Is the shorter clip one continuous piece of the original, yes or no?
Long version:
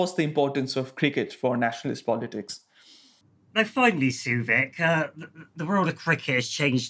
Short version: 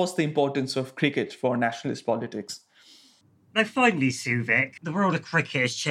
no